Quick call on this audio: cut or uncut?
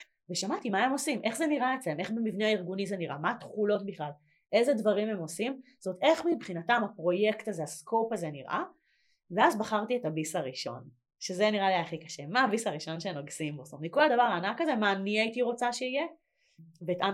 uncut